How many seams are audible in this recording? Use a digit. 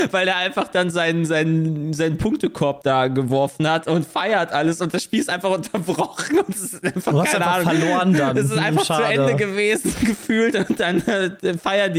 0